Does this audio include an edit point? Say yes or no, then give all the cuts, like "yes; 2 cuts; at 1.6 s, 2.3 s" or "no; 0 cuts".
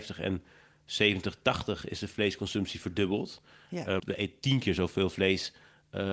yes; 1 cut; at 4.0 s